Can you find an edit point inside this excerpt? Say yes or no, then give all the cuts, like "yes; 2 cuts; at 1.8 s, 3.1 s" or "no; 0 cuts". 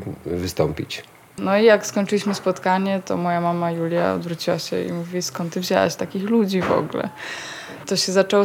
yes; 1 cut; at 1.4 s